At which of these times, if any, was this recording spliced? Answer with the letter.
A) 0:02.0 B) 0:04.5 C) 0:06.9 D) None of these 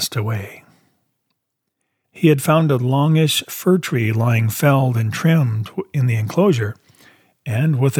A